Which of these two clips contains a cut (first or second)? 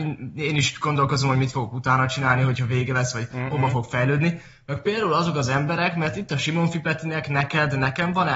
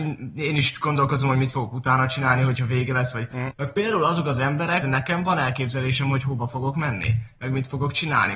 second